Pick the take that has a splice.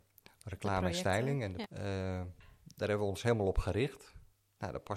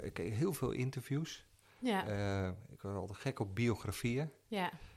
first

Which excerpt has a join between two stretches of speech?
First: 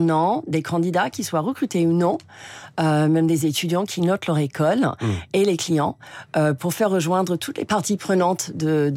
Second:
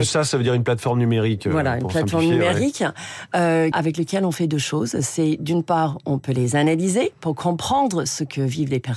second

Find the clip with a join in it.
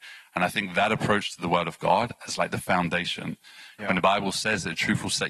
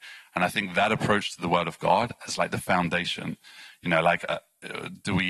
first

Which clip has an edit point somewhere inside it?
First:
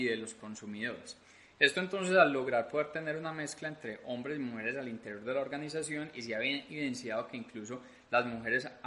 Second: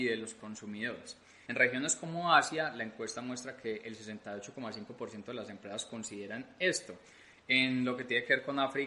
second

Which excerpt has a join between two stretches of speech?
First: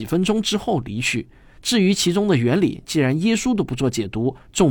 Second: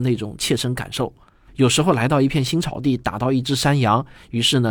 second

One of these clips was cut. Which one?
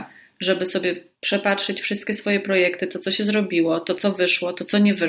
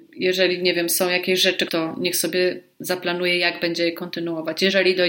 second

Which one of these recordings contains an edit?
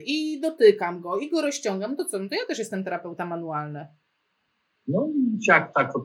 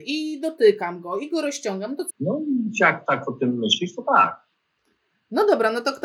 second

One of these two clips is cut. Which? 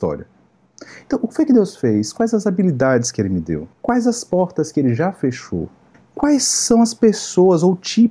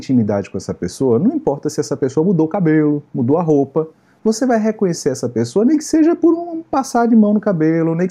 first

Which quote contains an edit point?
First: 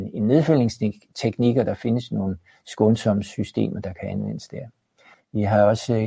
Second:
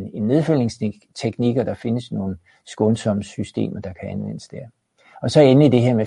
first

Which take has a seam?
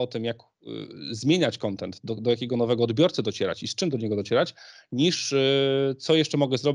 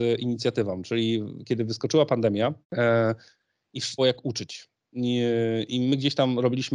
second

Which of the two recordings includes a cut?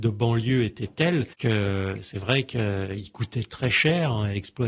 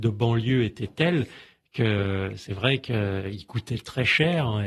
first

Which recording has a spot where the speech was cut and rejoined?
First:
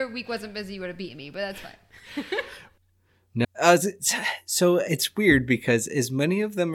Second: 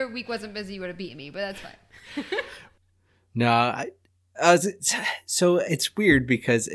first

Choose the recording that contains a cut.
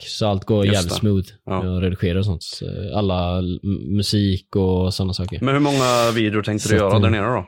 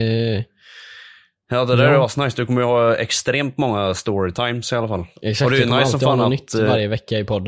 second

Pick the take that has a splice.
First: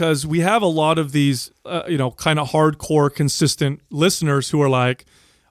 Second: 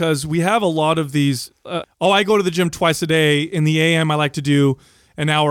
second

